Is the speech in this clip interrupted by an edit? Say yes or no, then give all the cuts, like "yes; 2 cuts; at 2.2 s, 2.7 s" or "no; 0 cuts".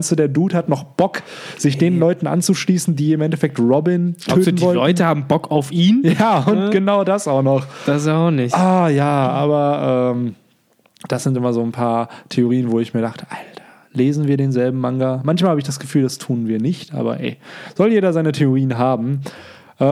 no; 0 cuts